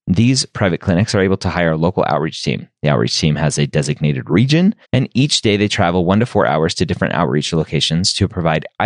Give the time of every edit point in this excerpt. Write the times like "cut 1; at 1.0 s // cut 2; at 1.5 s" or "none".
cut 1; at 4.8 s